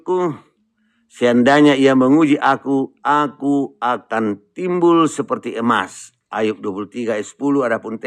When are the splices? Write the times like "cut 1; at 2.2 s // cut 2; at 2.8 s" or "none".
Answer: none